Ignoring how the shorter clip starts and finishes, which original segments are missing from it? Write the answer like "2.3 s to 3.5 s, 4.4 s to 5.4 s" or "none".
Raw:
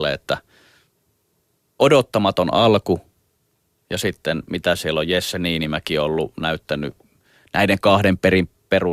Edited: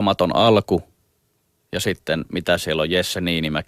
none